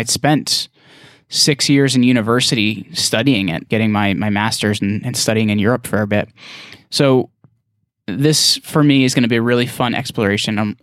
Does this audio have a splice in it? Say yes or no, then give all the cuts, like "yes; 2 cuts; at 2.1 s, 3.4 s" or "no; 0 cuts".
yes; 1 cut; at 3.7 s